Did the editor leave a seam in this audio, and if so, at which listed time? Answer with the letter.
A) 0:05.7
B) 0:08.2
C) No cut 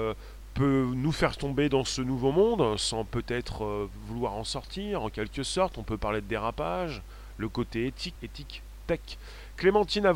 B